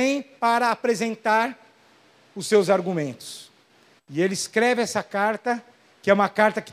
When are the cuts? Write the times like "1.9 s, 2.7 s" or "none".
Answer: 4.0 s